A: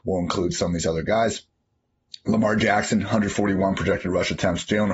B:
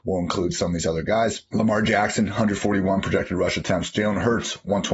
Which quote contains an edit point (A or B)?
B